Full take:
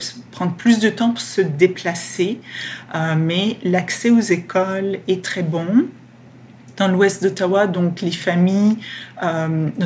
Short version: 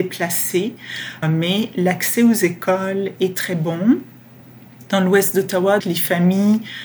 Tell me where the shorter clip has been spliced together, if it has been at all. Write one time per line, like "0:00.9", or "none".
0:01.2
0:05.8